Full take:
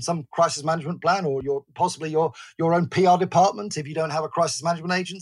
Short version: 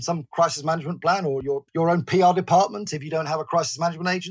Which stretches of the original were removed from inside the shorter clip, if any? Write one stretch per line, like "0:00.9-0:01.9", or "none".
0:01.7-0:02.5